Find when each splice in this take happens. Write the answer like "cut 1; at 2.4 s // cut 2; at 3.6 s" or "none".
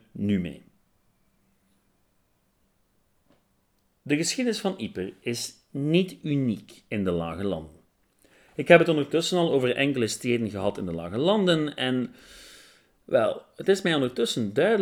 none

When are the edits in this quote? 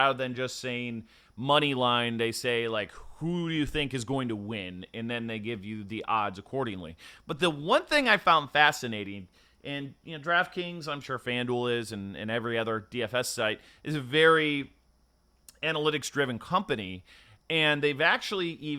none

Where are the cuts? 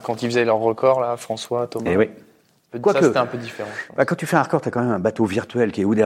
none

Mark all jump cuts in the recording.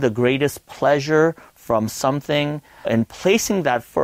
cut 1; at 2.8 s

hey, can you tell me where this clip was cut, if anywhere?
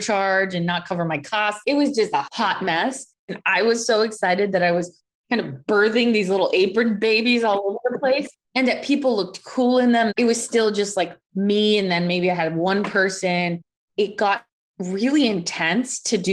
cut 1; at 3.3 s // cut 2; at 10.1 s

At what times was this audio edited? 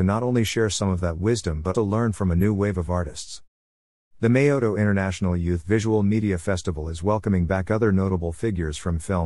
cut 1; at 1.7 s

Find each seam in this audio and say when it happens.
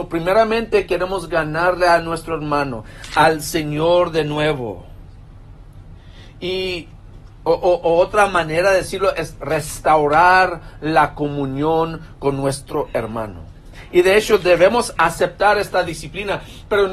none

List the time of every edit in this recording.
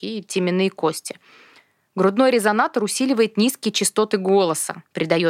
none

